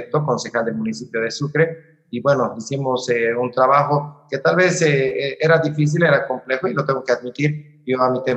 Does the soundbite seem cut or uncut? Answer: uncut